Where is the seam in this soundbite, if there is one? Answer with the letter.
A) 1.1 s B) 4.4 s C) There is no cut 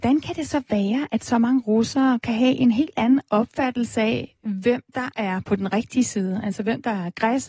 C